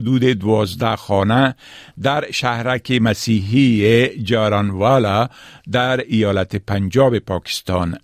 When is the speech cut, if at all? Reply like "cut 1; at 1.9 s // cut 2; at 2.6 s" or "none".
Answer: none